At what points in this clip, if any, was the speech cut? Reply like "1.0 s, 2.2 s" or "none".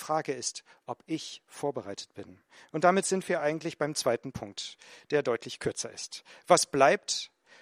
none